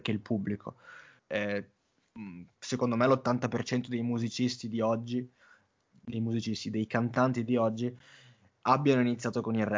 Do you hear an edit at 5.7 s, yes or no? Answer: no